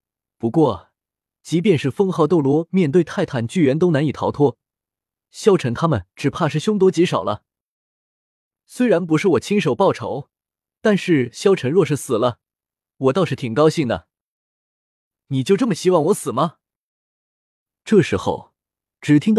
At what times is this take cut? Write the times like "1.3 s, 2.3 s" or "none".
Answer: 6.1 s